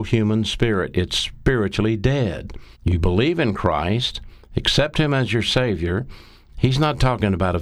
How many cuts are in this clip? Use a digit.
2